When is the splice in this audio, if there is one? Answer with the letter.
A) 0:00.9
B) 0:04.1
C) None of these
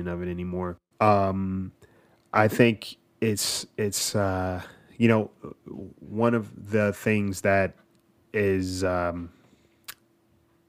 A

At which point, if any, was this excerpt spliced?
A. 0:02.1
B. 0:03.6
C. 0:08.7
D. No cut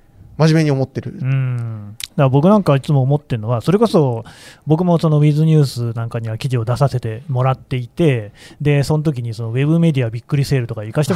A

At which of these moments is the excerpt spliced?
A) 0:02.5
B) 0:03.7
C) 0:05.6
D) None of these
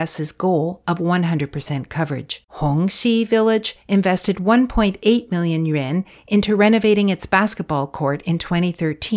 A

